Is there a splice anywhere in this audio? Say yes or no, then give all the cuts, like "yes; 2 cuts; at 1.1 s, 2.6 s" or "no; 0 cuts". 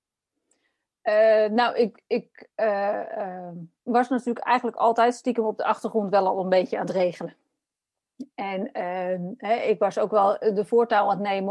no; 0 cuts